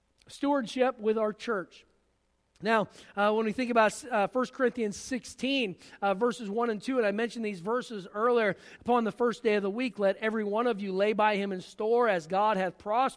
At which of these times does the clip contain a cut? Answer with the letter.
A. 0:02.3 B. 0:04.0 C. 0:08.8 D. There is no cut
C